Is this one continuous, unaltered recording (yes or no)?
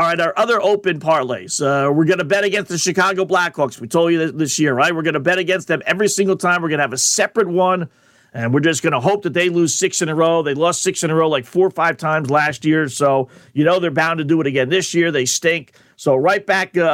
yes